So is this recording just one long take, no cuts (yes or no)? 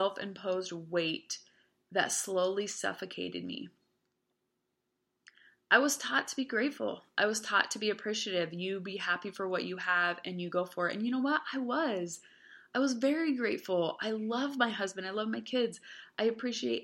yes